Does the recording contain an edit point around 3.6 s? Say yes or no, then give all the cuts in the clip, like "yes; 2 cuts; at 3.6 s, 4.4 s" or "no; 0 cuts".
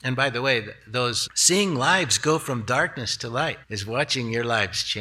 yes; 2 cuts; at 1.3 s, 3.6 s